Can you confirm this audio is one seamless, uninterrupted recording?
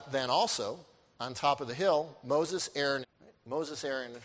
no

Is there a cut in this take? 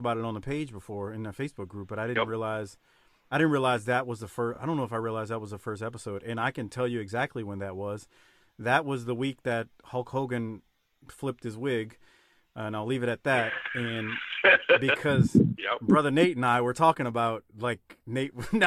no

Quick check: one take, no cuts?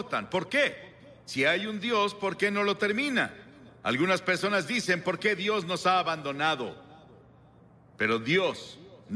yes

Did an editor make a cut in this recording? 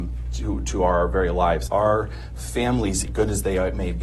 yes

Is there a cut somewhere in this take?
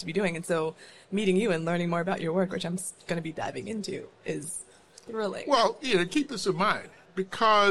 no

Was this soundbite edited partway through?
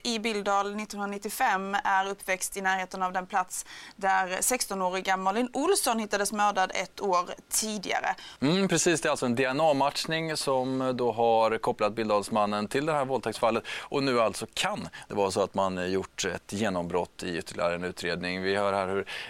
yes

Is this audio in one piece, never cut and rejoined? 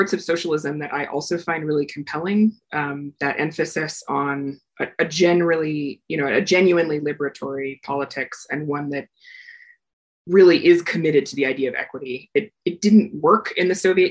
yes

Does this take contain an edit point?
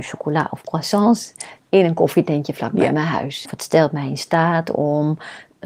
yes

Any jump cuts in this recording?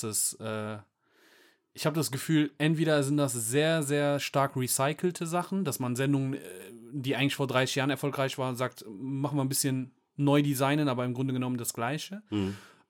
no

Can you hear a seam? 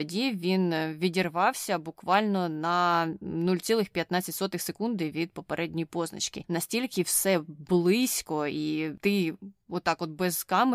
yes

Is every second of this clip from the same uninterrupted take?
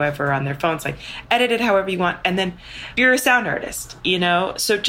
yes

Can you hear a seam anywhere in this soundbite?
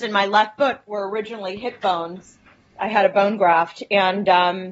no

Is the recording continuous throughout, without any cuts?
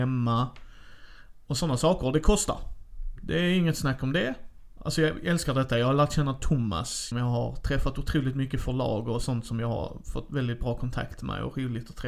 no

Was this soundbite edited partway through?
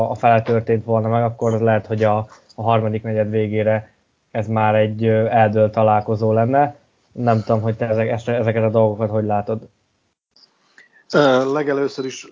no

